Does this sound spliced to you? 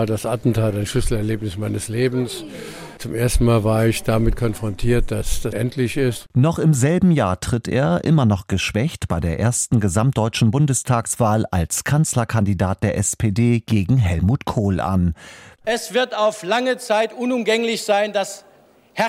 yes; 2 cuts; at 5.5 s, 15.6 s

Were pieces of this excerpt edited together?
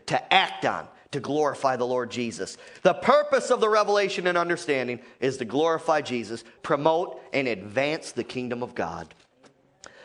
yes; 1 cut; at 6.6 s

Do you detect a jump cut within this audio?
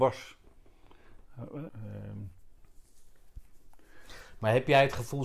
yes; 1 cut; at 1.7 s

